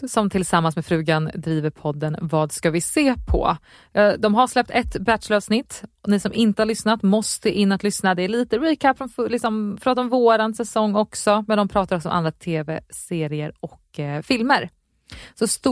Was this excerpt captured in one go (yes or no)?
yes